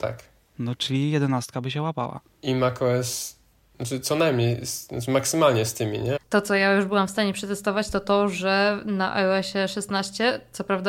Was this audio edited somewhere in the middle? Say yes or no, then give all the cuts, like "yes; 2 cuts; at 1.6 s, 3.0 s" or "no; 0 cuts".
yes; 1 cut; at 6.2 s